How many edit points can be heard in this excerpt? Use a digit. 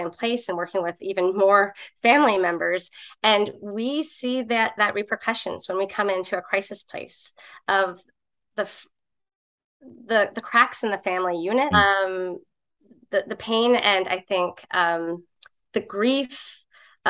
1